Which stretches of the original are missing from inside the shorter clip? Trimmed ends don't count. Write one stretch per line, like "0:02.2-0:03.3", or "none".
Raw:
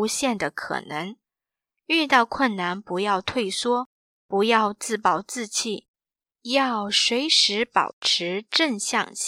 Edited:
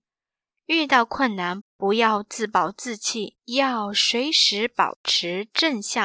0:02.8-0:04.1
0:05.9-0:06.3

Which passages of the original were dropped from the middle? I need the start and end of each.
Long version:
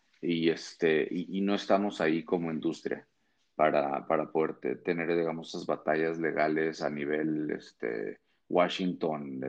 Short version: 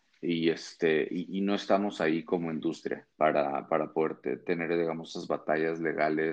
0:03.1-0:03.5

